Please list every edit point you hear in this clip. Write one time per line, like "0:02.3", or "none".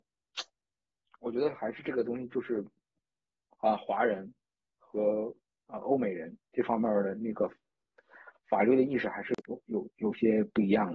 0:09.4

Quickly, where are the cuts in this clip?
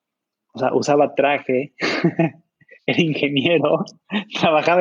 none

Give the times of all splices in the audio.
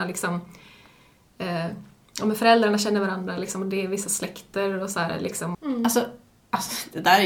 0:05.5

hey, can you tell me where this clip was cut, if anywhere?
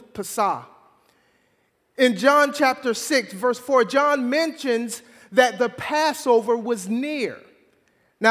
none

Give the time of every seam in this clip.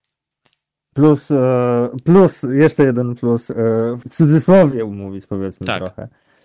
0:04.0

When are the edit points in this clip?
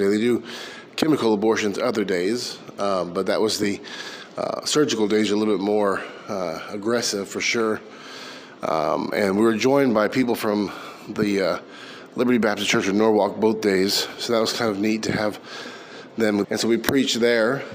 0:16.4

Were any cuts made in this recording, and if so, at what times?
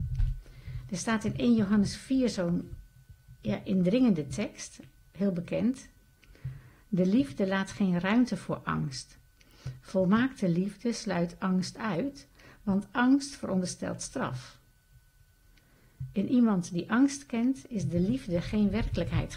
none

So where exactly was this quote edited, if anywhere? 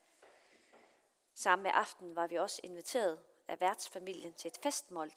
none

